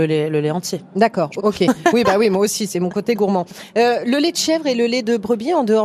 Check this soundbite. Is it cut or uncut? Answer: cut